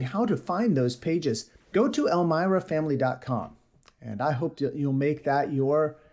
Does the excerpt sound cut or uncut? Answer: cut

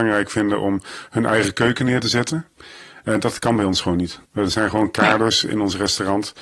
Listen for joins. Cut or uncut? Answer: cut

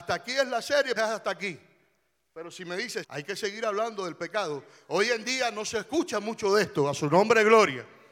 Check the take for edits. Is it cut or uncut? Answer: cut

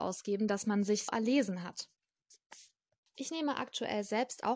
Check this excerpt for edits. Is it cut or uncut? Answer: cut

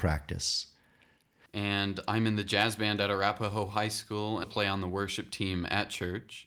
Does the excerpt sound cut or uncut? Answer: cut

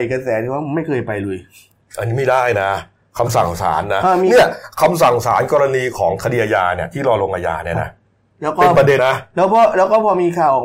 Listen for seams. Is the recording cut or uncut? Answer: cut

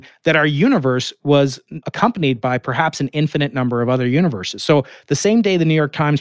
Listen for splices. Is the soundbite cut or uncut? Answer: cut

